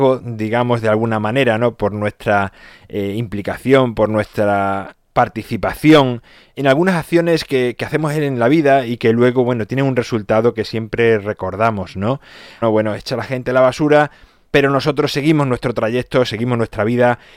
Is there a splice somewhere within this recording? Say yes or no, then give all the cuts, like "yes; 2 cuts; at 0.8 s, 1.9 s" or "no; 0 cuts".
yes; 2 cuts; at 12.6 s, 16.2 s